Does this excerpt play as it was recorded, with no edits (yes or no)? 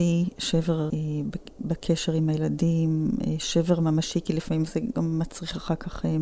no